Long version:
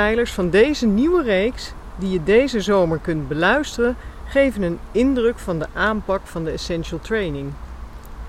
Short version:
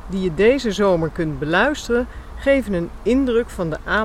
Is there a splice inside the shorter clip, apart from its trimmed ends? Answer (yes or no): no